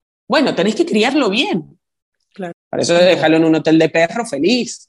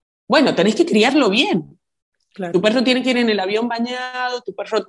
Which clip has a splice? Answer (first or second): first